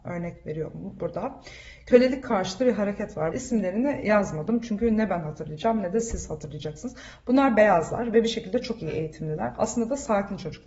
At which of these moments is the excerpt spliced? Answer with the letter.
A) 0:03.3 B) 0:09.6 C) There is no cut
A